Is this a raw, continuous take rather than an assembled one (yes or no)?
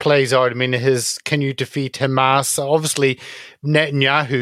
yes